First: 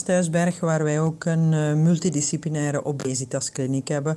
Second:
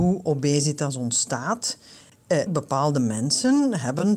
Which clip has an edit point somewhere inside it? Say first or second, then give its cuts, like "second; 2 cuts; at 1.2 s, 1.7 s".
second; 1 cut; at 2.5 s